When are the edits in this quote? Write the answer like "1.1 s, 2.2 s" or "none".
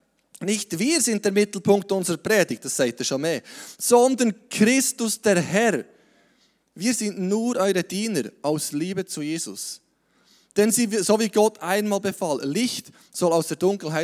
none